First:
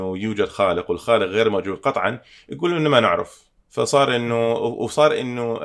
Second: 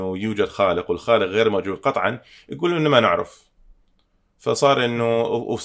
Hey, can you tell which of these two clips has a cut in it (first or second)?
first